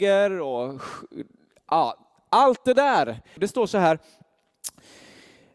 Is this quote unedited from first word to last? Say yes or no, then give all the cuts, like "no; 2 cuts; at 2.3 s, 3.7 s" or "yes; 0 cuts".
no; 1 cut; at 3.4 s